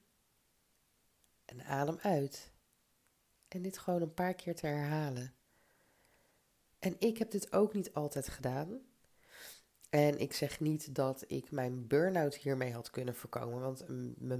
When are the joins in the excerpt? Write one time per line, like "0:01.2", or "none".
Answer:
none